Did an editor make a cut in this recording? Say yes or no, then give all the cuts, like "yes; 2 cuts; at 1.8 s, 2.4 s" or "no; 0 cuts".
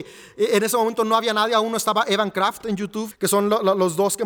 yes; 1 cut; at 3.1 s